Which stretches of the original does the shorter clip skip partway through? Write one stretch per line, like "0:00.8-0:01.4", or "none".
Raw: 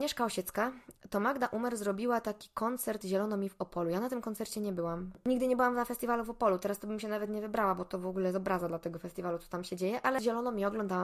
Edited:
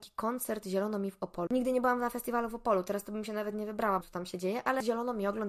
0:03.8-0:05.2
0:07.8-0:09.4